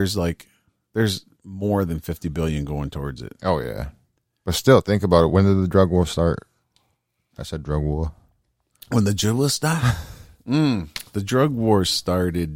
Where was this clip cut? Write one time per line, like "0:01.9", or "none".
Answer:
none